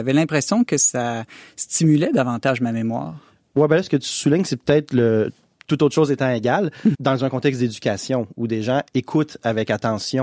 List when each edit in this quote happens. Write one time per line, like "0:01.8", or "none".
0:06.9